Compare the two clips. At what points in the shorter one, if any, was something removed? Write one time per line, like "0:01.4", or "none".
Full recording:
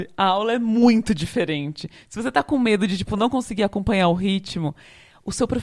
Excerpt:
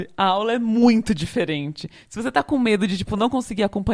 none